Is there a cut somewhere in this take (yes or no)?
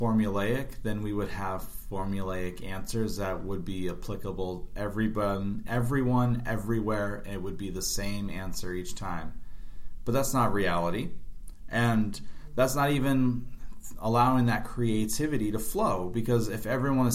no